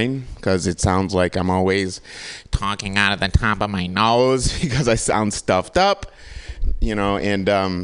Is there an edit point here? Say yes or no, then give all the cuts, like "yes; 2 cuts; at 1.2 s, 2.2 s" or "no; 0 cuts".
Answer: no; 0 cuts